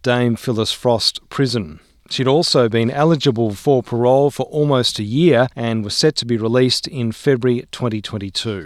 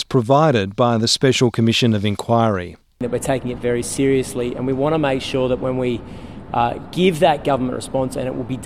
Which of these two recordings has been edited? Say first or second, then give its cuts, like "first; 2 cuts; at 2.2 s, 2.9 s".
first; 2 cuts; at 2.0 s, 5.5 s